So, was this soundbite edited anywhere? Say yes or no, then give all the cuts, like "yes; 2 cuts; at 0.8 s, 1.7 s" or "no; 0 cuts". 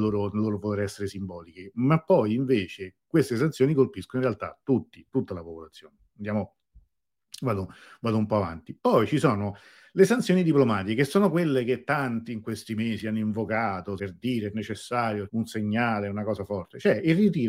yes; 2 cuts; at 14.0 s, 15.3 s